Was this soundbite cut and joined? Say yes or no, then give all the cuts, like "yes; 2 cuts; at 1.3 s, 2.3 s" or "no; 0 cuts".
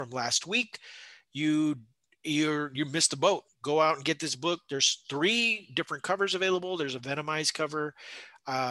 yes; 1 cut; at 3.5 s